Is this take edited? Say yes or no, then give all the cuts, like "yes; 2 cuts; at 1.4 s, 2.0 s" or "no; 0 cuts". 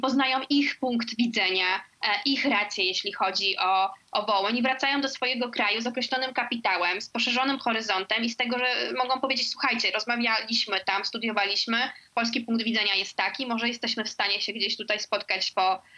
no; 0 cuts